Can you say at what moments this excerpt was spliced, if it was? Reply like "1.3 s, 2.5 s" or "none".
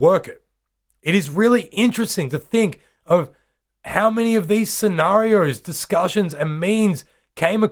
none